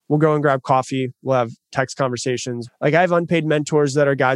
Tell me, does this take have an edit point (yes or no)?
yes